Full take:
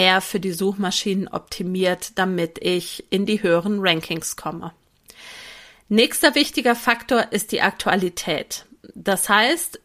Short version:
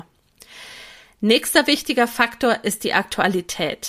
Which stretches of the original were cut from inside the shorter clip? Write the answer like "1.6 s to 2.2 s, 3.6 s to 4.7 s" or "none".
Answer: none